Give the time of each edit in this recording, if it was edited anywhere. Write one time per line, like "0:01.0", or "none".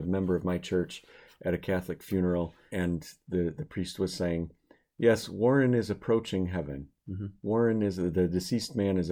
0:02.7